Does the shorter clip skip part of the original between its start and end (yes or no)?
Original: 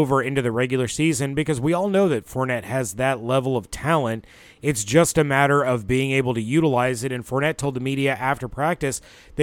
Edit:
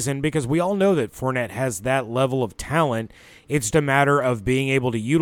yes